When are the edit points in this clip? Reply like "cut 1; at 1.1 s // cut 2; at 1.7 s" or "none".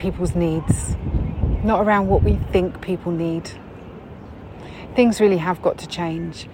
none